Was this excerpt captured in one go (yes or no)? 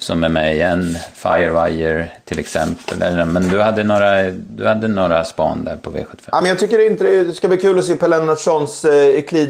yes